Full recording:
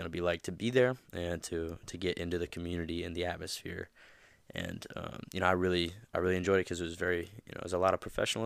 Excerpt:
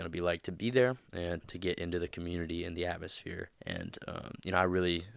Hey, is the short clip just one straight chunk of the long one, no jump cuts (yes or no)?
no